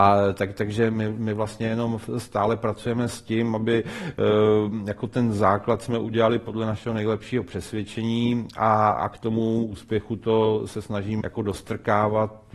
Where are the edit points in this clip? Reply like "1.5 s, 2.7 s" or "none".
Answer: 8.9 s, 11.2 s

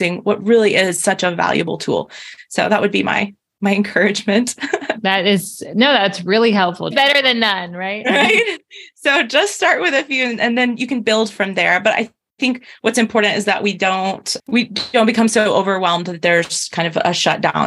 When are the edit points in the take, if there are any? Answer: 6.9 s

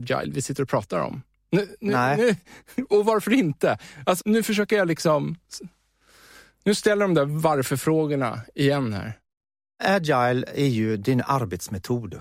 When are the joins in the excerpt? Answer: 4.2 s

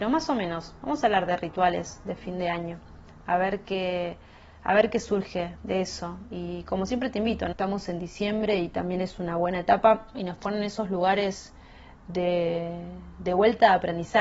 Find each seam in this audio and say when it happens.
7.5 s, 10.1 s

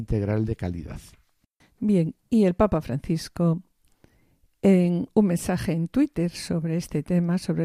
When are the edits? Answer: none

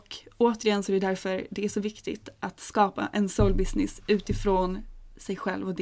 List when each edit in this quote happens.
none

